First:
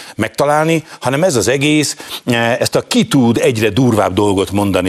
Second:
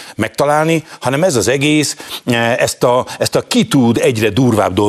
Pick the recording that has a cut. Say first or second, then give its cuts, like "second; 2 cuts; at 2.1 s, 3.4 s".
first; 1 cut; at 2.6 s